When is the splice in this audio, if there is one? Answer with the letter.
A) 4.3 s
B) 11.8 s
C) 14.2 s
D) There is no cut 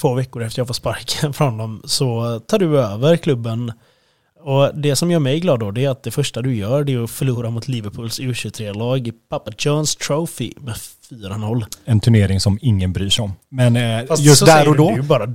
D